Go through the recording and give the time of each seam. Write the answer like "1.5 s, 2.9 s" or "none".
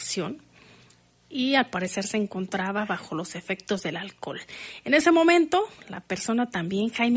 none